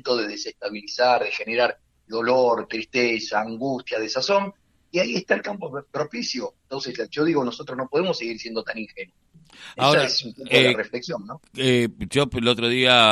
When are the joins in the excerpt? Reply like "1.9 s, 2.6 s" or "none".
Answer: 2.1 s